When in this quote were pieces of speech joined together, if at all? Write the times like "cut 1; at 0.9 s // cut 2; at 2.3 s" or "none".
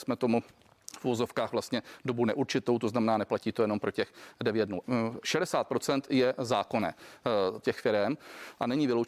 cut 1; at 4.8 s // cut 2; at 7.6 s